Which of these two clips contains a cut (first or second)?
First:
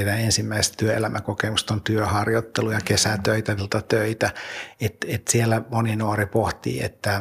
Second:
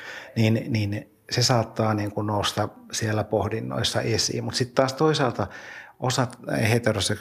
first